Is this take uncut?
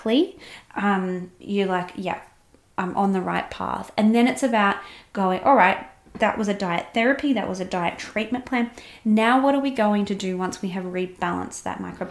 yes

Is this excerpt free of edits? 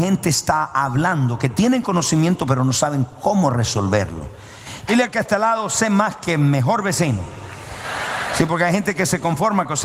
no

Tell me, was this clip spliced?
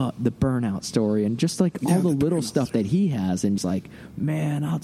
yes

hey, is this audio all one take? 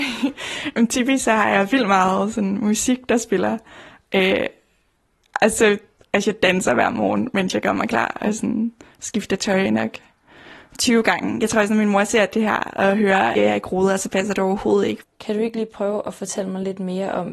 no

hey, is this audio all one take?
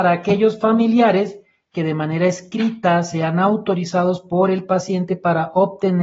yes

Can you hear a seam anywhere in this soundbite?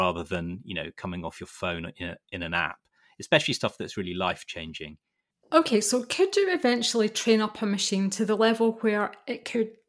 no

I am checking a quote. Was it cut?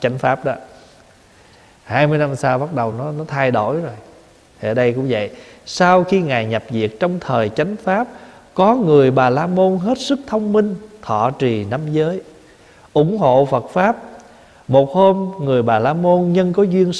no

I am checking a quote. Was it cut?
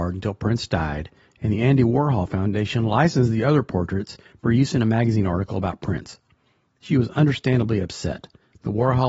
no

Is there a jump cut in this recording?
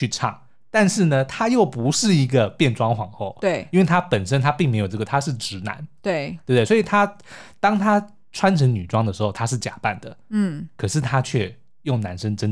no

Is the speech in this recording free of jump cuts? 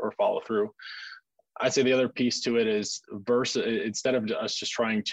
yes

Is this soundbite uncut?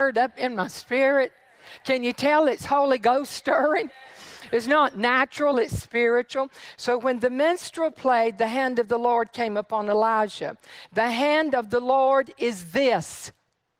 no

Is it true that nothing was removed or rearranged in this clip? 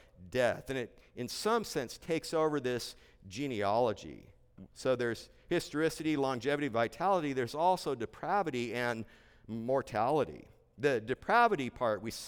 yes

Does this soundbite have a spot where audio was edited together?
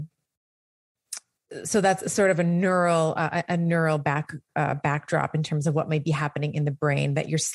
no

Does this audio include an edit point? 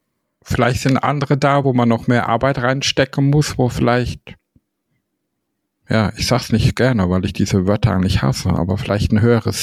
no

